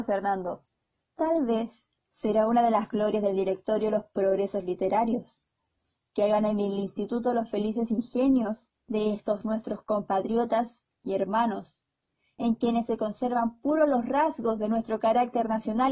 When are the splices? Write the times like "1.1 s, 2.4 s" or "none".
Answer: 1.0 s, 8.8 s